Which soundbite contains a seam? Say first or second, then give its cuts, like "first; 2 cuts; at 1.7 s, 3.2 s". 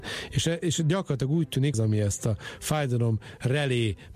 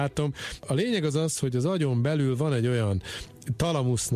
first; 1 cut; at 1.7 s